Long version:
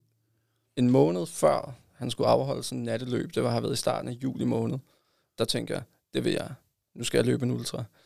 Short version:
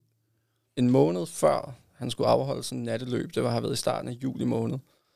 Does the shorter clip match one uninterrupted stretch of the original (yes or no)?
yes